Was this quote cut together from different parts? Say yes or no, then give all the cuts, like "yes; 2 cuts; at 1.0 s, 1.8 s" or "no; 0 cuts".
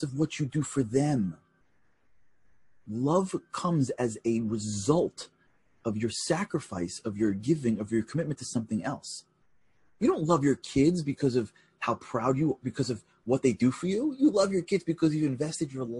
no; 0 cuts